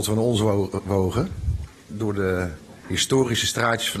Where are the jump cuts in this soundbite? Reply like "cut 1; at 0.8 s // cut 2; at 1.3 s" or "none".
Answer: none